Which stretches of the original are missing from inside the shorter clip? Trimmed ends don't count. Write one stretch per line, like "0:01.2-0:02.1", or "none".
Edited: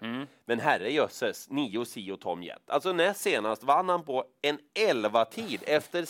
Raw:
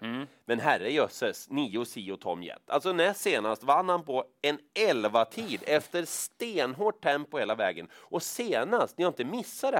none